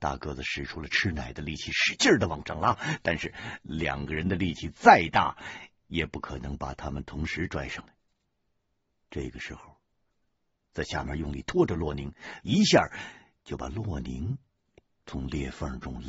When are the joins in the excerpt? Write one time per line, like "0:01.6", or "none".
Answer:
0:10.5
0:12.4

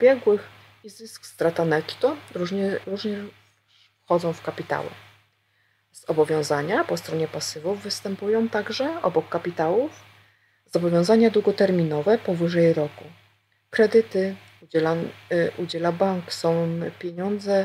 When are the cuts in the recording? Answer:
0:02.8

